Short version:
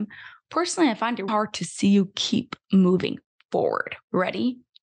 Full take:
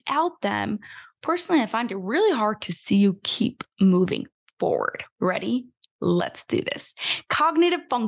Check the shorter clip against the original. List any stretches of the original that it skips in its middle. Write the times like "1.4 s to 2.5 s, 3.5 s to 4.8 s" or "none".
2.0 s to 2.4 s